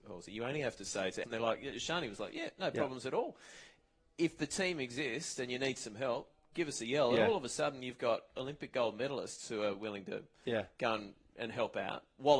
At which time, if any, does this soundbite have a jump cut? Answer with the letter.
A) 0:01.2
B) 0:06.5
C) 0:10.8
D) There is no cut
A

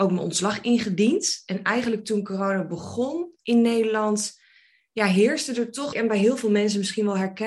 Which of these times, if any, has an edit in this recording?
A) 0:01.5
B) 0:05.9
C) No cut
B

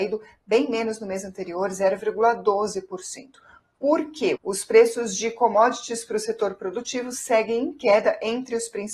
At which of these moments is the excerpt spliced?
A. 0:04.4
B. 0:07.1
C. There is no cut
A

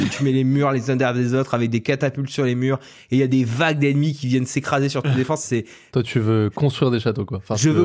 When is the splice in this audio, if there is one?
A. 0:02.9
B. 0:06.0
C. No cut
C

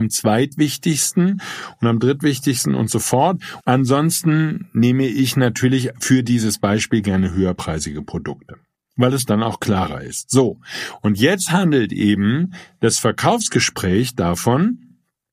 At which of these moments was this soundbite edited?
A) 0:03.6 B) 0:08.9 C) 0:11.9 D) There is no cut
A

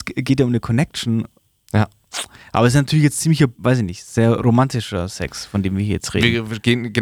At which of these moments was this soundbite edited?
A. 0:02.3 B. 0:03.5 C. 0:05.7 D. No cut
B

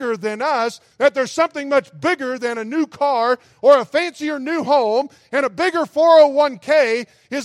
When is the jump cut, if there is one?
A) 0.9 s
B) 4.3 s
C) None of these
A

